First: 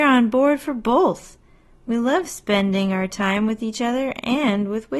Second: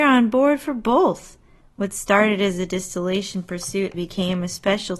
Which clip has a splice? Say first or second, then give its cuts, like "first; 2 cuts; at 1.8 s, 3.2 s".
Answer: second; 2 cuts; at 1.6 s, 3.9 s